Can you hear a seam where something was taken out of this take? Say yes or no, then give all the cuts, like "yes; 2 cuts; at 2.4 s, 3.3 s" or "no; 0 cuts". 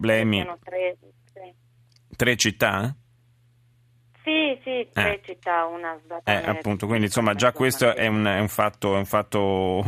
no; 0 cuts